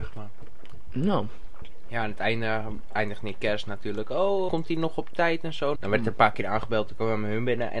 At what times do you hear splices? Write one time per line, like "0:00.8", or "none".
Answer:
0:04.5
0:05.8